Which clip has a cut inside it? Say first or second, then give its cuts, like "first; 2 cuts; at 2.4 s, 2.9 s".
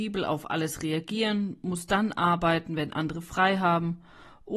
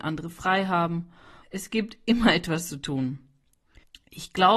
second; 1 cut; at 1.4 s